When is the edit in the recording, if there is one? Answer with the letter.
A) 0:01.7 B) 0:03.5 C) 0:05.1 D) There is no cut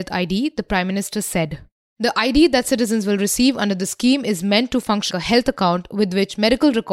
C